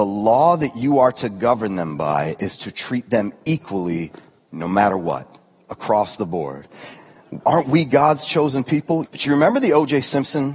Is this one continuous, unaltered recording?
no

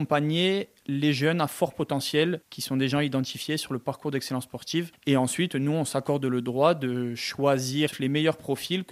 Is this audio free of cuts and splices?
no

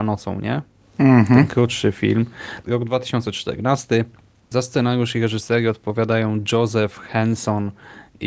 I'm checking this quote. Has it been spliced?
yes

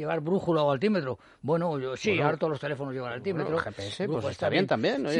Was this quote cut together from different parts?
no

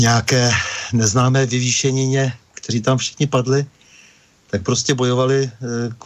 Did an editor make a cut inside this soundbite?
no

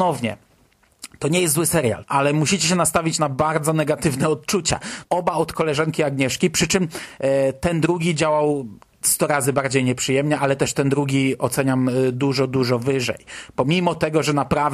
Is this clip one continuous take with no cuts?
no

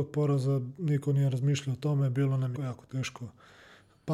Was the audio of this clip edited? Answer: yes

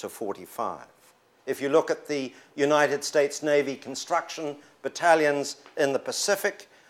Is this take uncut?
no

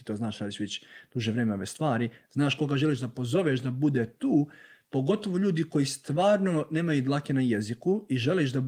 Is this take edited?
no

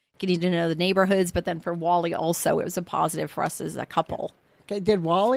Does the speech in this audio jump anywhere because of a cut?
no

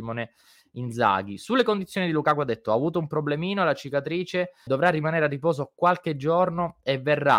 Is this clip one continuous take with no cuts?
no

